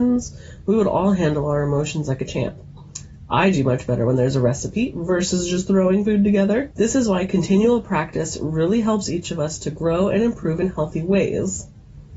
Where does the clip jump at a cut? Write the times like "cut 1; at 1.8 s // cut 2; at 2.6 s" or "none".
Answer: cut 1; at 6.7 s